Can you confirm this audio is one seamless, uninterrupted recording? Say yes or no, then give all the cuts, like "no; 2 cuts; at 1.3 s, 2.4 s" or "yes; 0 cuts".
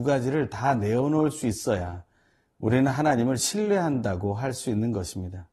yes; 0 cuts